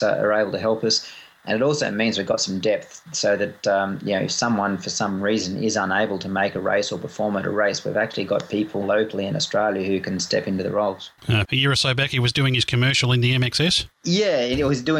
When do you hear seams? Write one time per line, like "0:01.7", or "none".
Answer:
0:08.8
0:11.4